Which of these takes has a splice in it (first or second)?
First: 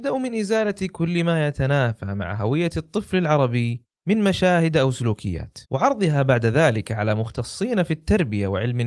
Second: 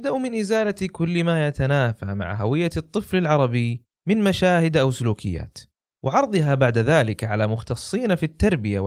first